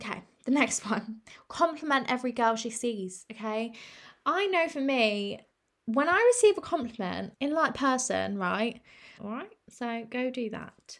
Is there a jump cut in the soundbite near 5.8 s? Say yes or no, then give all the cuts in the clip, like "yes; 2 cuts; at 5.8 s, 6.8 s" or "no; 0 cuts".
no; 2 cuts; at 7.3 s, 9.2 s